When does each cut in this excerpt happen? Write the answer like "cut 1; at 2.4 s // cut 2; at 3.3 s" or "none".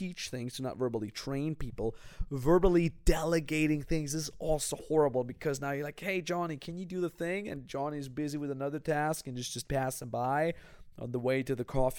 none